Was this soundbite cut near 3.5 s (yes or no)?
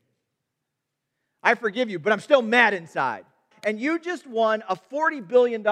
yes